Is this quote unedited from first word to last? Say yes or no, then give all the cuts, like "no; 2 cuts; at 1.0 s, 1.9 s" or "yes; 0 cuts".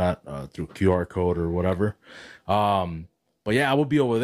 yes; 0 cuts